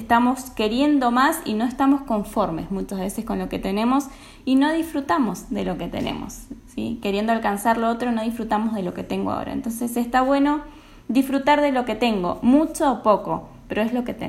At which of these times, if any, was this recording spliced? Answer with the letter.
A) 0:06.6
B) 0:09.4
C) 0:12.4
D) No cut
D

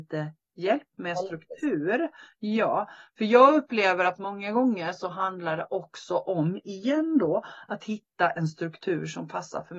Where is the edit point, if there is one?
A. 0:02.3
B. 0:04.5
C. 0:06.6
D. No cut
D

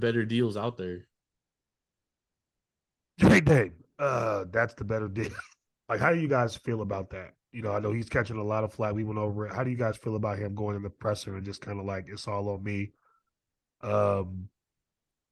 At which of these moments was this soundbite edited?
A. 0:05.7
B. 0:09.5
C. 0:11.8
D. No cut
A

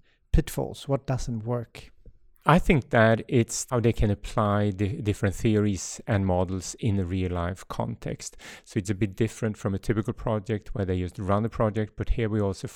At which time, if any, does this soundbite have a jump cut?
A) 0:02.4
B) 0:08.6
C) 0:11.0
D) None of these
A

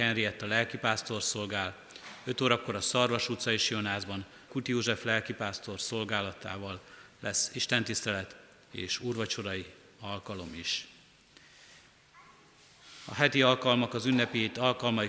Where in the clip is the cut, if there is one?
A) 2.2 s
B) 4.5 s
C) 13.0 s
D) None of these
B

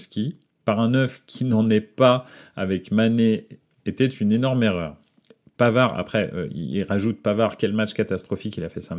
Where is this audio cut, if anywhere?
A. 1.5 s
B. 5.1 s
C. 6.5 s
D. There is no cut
D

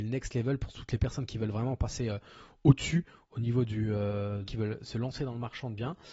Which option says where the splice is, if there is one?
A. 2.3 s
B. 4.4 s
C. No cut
B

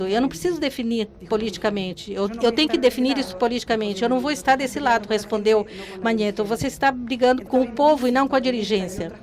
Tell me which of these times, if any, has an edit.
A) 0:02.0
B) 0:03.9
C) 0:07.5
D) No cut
C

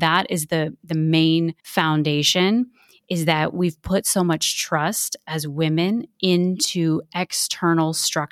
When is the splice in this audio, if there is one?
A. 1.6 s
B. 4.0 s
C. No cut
A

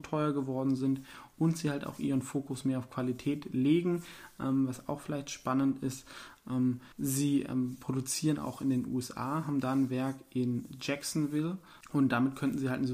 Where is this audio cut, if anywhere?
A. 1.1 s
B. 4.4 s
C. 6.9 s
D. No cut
C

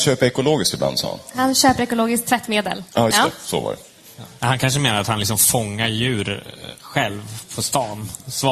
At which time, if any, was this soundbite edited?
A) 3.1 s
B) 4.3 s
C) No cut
A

